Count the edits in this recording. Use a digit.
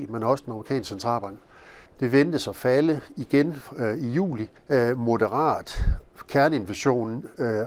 2